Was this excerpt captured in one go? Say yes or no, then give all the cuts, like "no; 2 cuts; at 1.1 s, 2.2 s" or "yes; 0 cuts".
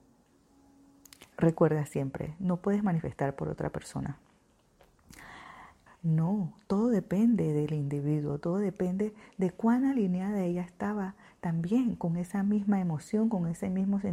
no; 2 cuts; at 1.3 s, 5.9 s